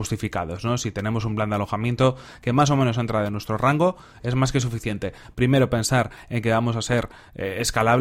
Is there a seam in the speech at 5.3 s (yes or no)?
yes